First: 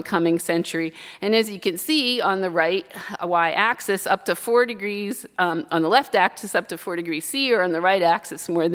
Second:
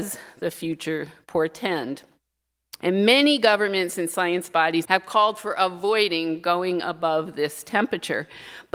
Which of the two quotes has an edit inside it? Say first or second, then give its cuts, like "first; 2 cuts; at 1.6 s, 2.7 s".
second; 2 cuts; at 2.8 s, 4.8 s